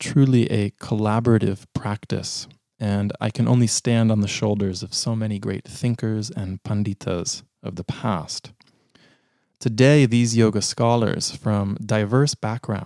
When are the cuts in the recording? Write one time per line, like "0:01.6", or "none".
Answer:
none